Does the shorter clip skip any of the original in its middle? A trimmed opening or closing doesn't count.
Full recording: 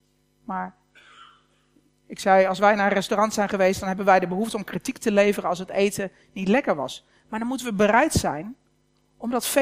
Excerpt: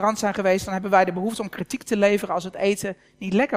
no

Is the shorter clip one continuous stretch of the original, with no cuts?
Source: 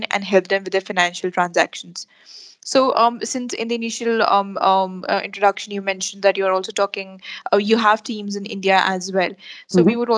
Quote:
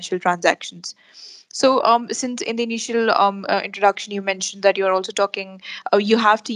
no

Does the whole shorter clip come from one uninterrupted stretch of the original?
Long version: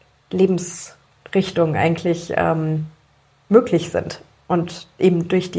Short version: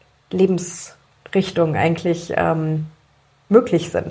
yes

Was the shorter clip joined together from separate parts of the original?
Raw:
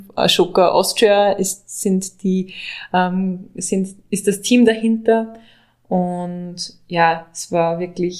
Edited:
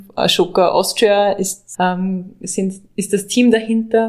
yes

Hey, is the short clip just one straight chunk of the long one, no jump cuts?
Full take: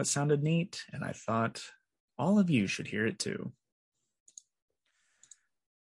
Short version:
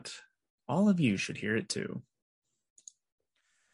yes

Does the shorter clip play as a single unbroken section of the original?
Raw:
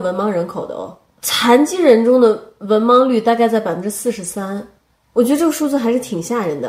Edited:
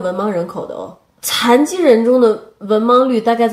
yes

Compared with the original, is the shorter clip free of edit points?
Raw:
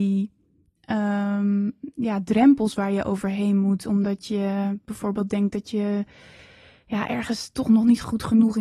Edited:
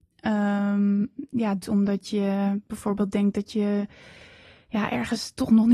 no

